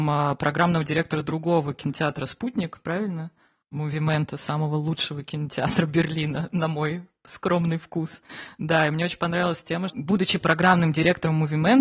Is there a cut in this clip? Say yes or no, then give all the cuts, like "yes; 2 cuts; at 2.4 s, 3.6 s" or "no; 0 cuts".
yes; 2 cuts; at 3.6 s, 9.9 s